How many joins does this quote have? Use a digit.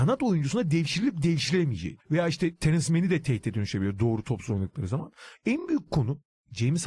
2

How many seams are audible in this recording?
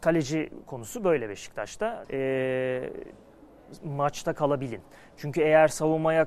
1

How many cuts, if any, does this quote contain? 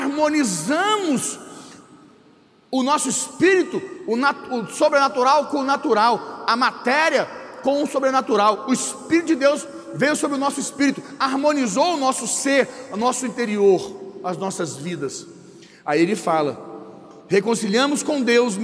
0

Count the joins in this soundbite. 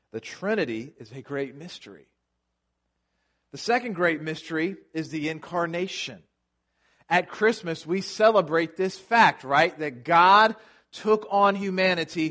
0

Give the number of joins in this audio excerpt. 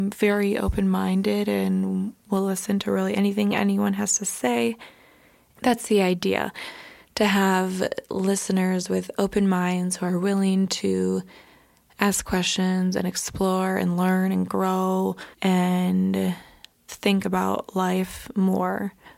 3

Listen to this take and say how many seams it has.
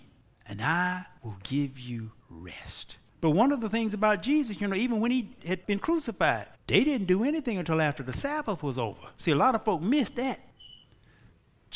1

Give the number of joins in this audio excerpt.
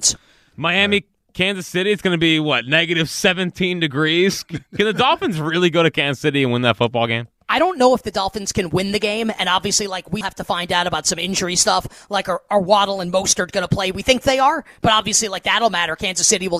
1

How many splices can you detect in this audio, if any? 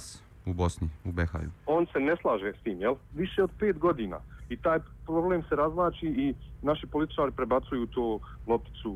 2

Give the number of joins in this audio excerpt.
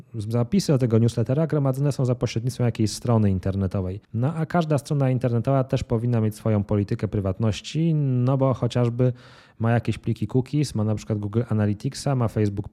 1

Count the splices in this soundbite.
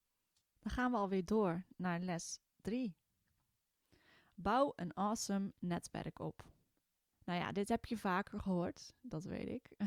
0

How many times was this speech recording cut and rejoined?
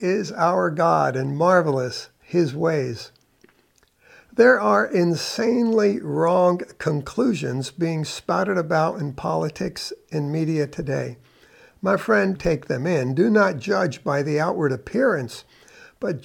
1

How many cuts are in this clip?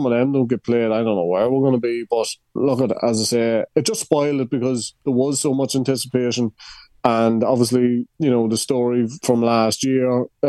2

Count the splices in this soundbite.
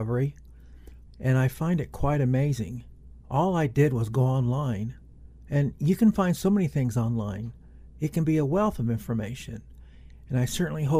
1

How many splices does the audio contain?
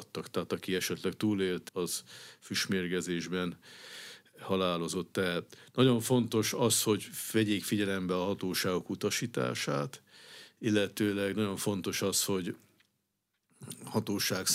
1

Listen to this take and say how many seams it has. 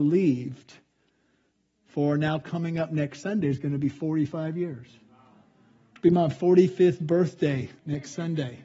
0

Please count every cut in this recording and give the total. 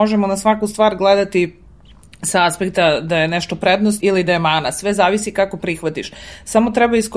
1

